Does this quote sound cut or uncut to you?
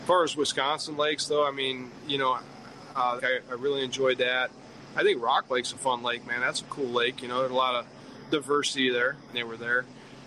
cut